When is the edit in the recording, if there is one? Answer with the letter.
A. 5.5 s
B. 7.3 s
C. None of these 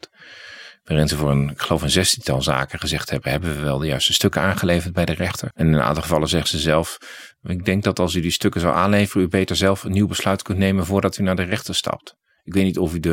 A